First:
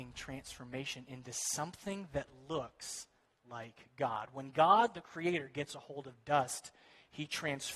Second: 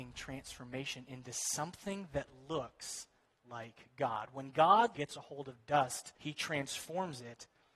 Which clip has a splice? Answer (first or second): second